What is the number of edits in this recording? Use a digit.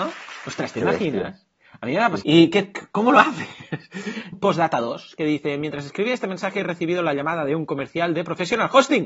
2